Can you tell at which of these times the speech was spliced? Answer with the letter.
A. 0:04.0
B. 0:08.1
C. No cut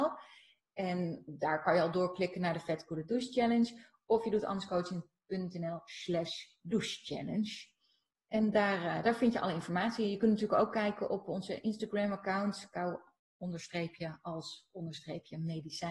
C